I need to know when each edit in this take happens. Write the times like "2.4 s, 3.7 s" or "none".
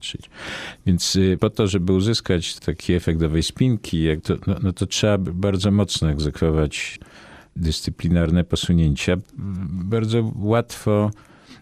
none